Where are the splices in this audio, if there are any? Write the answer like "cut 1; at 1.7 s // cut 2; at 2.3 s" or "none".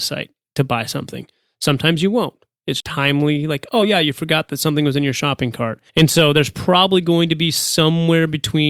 cut 1; at 2.8 s // cut 2; at 5.9 s